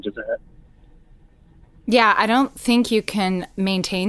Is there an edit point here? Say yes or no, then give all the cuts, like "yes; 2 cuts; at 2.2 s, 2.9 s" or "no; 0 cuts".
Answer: no; 0 cuts